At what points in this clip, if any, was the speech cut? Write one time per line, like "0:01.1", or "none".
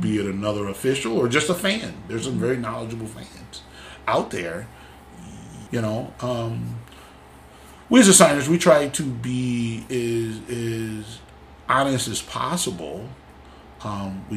0:05.7